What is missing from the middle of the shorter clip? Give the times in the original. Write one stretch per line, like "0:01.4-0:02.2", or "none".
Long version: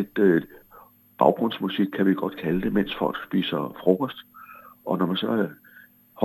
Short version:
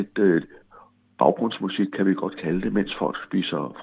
none